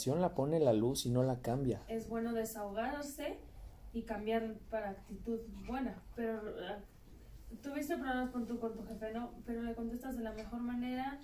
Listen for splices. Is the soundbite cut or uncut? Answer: cut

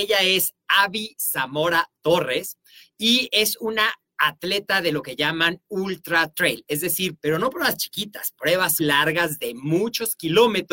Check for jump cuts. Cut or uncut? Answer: cut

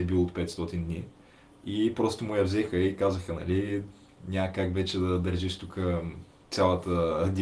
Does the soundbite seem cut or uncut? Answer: uncut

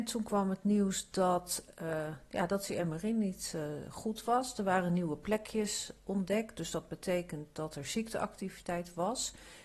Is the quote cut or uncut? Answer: uncut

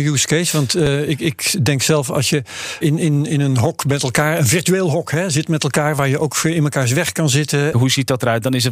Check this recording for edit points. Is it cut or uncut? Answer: cut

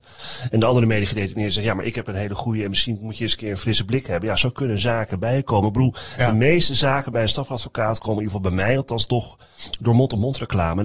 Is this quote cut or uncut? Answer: uncut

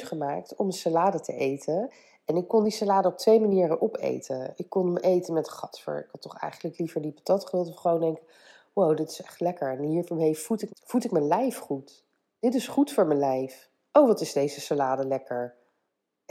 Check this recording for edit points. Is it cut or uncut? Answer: cut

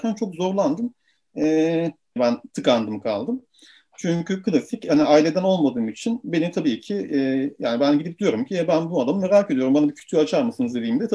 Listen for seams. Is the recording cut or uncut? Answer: cut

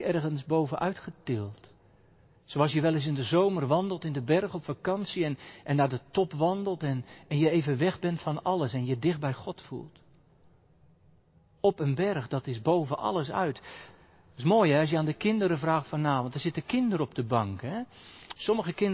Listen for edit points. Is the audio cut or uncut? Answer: uncut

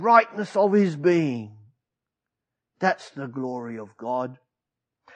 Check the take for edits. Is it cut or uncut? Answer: uncut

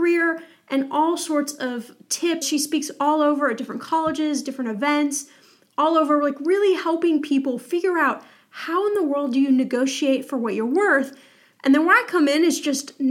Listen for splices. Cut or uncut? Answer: cut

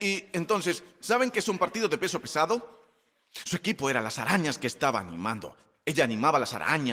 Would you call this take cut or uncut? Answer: cut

